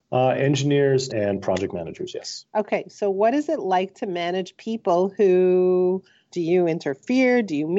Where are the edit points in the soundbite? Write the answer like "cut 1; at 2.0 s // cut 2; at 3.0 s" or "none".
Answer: cut 1; at 1.1 s // cut 2; at 6.3 s